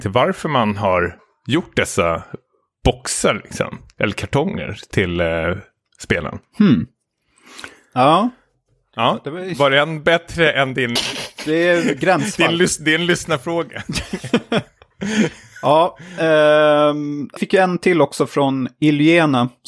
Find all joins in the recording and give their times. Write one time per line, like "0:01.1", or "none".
0:11.0
0:17.4